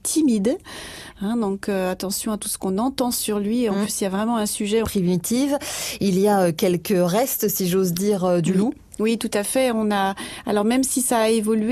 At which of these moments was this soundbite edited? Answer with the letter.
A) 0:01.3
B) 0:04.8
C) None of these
B